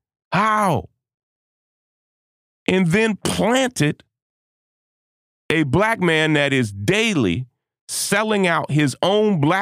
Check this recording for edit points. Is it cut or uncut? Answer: uncut